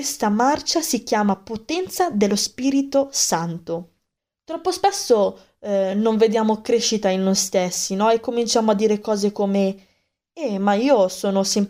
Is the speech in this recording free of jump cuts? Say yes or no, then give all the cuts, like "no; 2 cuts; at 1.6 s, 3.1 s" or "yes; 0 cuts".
yes; 0 cuts